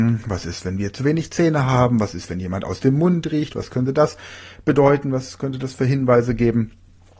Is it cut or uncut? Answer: uncut